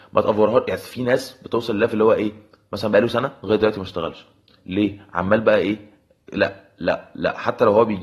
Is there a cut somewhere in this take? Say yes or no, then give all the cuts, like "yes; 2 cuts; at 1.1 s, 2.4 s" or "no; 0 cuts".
no; 0 cuts